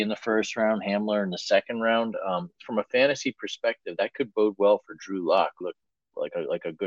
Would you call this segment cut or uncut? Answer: cut